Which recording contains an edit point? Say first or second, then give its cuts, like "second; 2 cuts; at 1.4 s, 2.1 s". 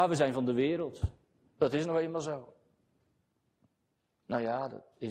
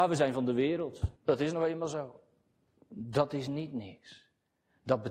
second; 2 cuts; at 1.2 s, 2.8 s